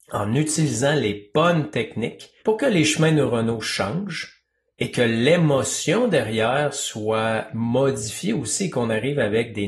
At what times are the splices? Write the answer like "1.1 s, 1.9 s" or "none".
2.4 s